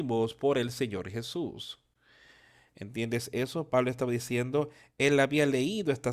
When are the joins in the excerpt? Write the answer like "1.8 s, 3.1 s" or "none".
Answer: none